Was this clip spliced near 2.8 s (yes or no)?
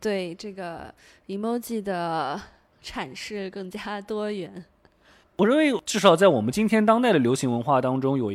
no